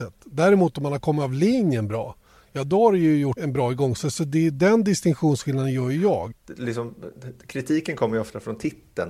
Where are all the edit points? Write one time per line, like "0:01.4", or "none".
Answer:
0:03.4
0:06.3